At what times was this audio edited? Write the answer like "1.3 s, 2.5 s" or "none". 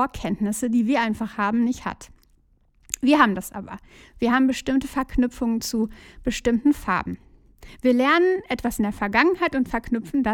none